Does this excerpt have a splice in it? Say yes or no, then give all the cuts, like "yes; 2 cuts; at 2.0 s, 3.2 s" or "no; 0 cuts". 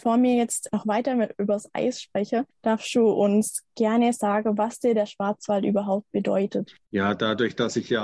no; 0 cuts